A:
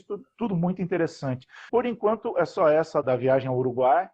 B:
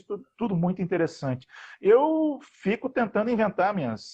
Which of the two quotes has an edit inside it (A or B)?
A